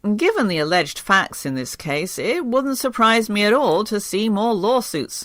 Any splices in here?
no; 0 cuts

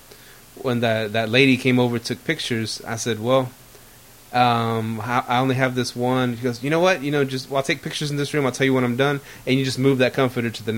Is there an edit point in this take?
no; 0 cuts

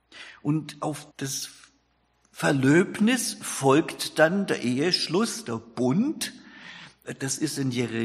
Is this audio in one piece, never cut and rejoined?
no; 1 cut; at 1.1 s

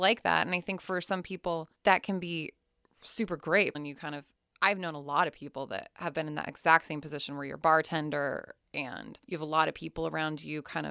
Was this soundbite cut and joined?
yes; 2 cuts; at 3.7 s, 9.2 s

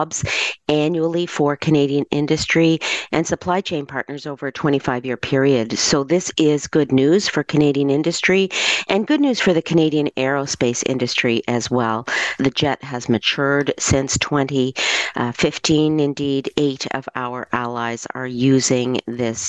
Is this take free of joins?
no; 1 cut; at 12.4 s

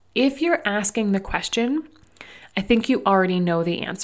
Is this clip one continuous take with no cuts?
yes; 0 cuts

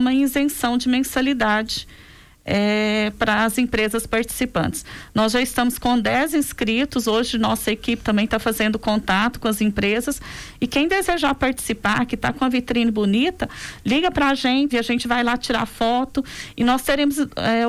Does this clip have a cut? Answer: yes; 1 cut; at 14.7 s

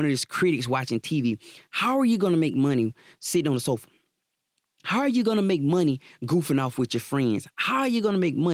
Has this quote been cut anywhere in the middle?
no; 0 cuts

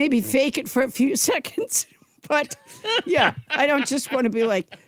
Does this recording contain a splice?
no; 0 cuts

